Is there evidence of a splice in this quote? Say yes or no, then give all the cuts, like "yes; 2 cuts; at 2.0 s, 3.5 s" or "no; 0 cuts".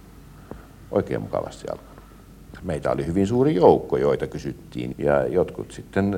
yes; 2 cuts; at 2.6 s, 4.9 s